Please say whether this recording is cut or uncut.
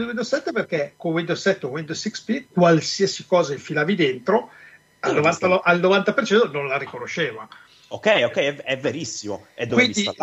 uncut